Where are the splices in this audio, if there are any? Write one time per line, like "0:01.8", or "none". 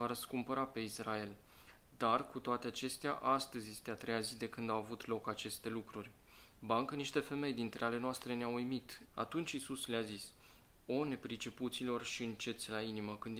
0:09.0